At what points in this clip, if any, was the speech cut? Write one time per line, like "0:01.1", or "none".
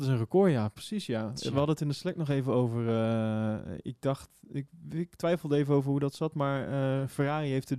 none